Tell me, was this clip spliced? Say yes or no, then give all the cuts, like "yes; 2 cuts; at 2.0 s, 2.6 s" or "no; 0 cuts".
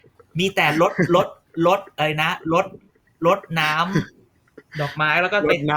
no; 0 cuts